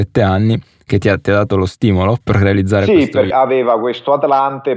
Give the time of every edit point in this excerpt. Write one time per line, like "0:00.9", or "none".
0:02.2
0:03.3